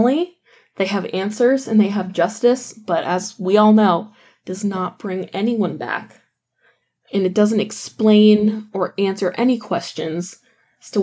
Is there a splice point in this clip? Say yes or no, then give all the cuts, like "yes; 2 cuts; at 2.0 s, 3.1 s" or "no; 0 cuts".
no; 0 cuts